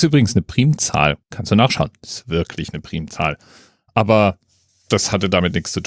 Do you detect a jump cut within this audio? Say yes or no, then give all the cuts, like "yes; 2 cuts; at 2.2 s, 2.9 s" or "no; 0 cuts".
yes; 1 cut; at 1.2 s